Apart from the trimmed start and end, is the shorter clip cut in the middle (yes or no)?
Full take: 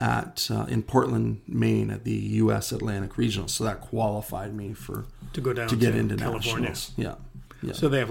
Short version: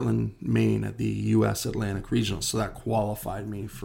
no